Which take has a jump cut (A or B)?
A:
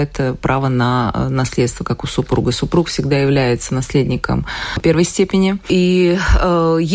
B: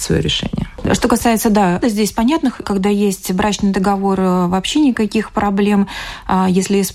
B